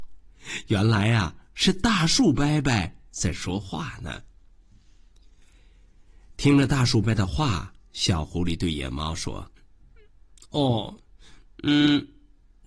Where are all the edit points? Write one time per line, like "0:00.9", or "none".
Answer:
0:07.0
0:09.6

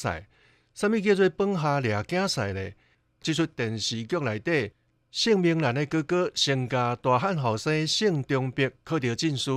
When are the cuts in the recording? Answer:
0:03.2

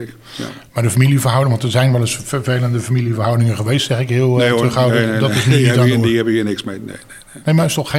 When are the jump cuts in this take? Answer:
none

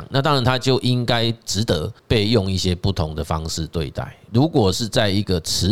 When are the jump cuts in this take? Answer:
0:02.0
0:04.3

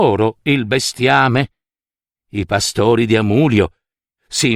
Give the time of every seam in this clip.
none

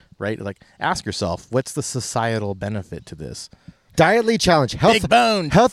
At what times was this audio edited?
0:03.9

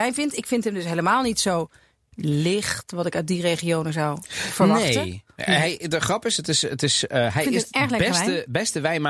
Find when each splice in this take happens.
none

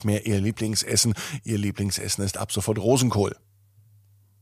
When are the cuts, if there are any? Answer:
none

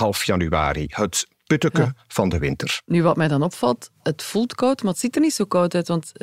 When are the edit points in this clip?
none

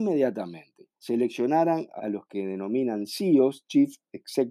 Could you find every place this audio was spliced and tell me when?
0:01.0
0:02.0

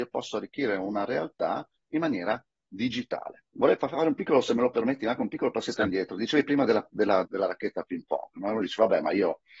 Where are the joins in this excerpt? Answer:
0:03.5
0:07.3

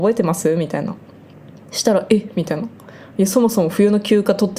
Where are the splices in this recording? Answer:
none

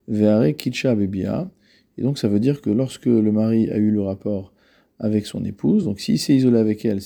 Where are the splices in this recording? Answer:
none

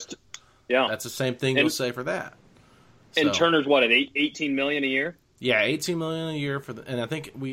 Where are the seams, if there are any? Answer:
none

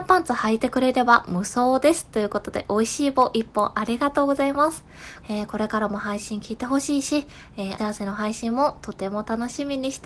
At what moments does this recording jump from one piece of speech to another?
0:05.2
0:07.8

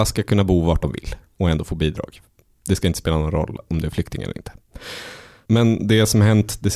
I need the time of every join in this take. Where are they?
0:05.5

